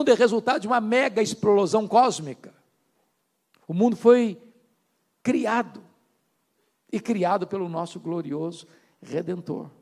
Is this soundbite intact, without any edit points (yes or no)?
no